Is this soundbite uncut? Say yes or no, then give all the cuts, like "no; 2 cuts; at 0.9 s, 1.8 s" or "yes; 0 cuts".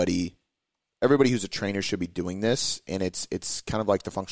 yes; 0 cuts